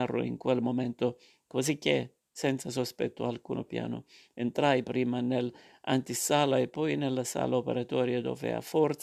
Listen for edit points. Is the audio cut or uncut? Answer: cut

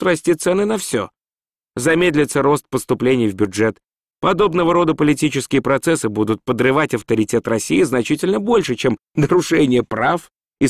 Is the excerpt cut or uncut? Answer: cut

